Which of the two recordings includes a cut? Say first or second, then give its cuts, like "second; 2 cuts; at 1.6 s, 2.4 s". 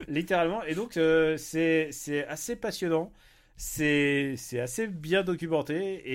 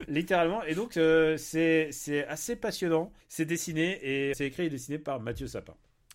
second; 2 cuts; at 3.2 s, 4.3 s